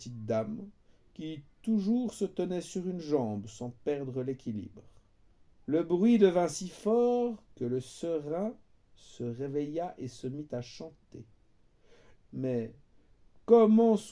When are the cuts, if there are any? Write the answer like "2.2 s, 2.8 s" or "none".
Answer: 5.6 s, 12.2 s